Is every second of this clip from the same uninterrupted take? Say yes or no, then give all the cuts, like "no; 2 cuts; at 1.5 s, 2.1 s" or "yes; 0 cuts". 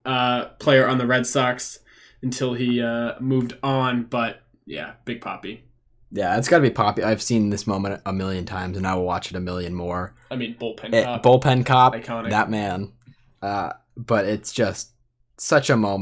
yes; 0 cuts